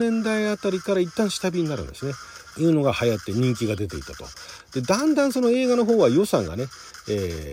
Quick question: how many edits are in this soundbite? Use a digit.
1